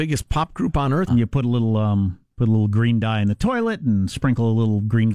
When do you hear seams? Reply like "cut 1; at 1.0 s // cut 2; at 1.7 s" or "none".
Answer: cut 1; at 1.1 s // cut 2; at 2.3 s